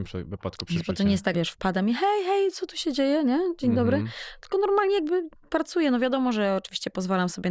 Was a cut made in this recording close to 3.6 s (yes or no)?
no